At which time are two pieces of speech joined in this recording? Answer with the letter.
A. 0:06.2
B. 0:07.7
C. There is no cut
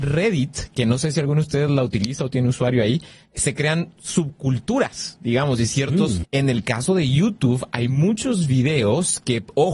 A